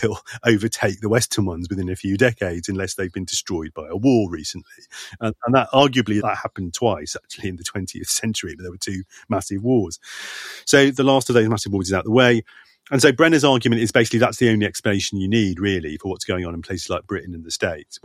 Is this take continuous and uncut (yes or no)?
no